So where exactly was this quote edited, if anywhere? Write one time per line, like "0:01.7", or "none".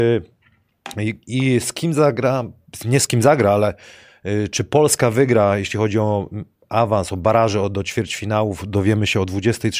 none